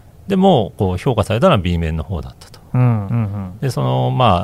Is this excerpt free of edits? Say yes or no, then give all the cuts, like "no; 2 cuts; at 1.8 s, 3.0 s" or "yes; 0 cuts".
no; 1 cut; at 3.1 s